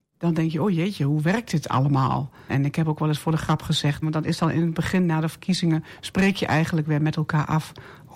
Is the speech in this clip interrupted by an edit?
yes; 2 cuts; at 2.5 s, 4.0 s

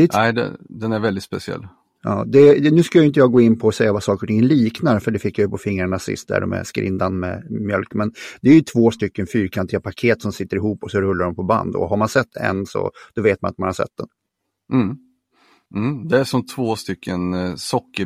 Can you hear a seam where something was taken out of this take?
no; 0 cuts

